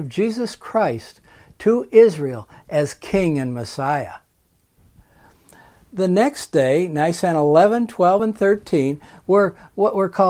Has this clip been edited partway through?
no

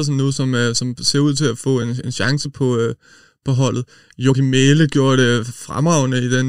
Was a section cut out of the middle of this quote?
no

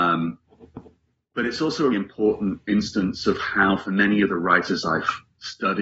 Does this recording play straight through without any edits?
no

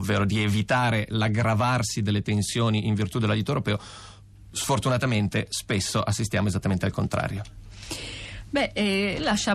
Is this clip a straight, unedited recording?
yes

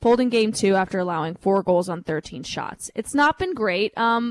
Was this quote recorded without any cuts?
yes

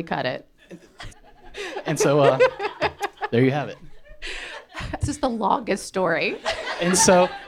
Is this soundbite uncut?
no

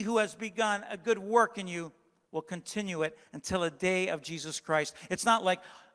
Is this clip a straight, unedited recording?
yes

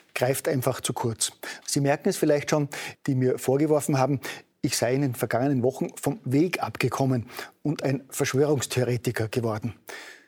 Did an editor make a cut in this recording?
yes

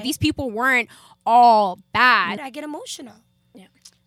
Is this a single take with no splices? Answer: no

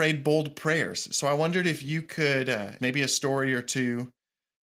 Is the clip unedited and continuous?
no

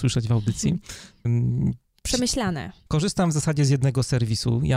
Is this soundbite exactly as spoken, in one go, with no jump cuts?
no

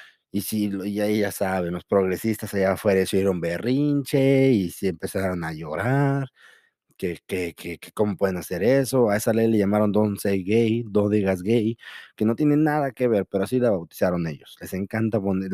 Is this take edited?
no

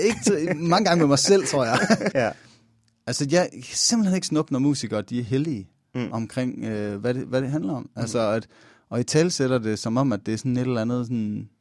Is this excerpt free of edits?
no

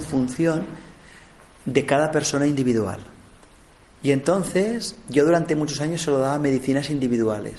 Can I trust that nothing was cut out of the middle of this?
yes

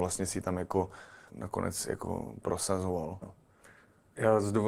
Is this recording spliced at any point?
yes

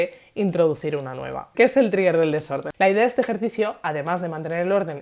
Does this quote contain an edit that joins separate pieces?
yes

